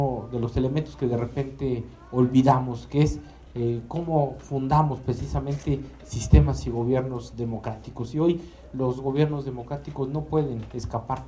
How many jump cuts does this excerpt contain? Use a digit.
0